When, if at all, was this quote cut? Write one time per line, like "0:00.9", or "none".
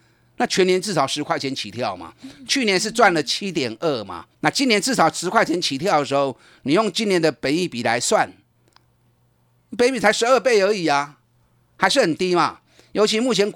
0:04.3